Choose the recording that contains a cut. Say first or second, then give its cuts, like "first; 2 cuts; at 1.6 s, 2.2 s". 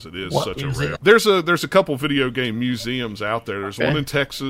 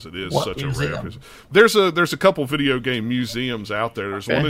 first; 1 cut; at 1.0 s